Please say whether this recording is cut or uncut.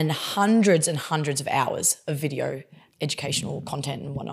cut